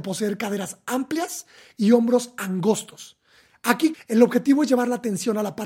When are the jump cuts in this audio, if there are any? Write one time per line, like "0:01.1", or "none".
0:03.9